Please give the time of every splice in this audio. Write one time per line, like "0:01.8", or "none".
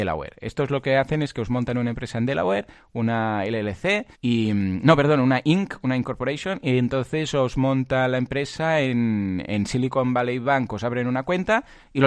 0:04.1